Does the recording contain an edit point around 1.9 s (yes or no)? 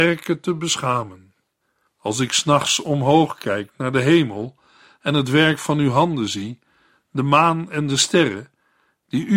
yes